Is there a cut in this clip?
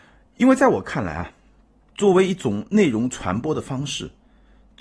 no; 0 cuts

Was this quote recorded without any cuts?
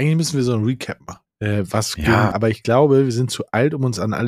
no; 1 cut; at 2.3 s

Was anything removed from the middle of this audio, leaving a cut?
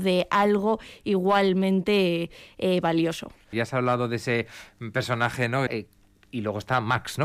yes; 2 cuts; at 3.5 s, 5.7 s

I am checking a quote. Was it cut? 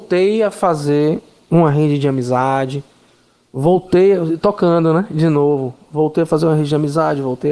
no; 0 cuts

